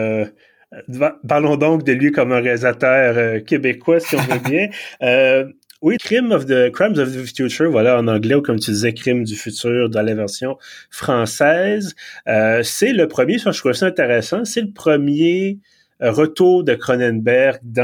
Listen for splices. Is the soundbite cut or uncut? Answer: cut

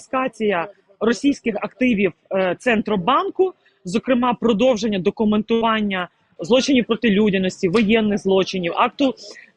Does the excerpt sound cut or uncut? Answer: cut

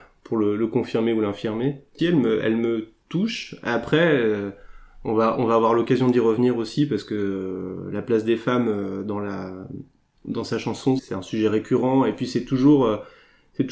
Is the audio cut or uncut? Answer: cut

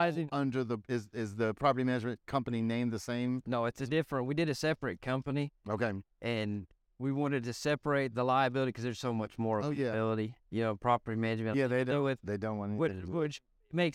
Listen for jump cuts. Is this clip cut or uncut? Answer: cut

